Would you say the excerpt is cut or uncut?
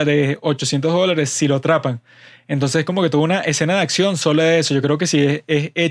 uncut